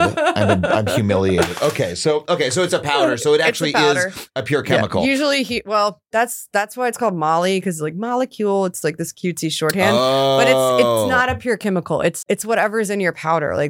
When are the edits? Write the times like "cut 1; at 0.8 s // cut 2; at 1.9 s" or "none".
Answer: cut 1; at 12.2 s